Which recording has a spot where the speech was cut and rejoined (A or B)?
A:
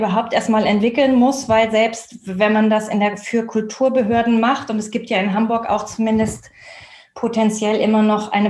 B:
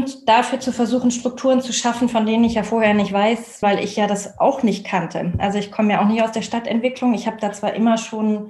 B